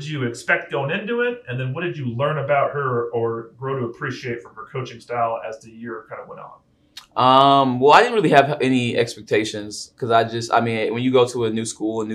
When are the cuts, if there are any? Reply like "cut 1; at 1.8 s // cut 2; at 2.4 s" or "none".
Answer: none